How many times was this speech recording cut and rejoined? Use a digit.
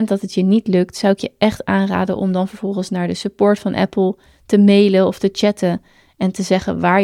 0